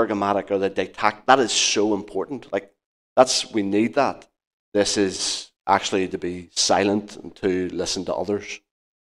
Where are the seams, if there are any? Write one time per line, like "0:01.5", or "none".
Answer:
0:04.6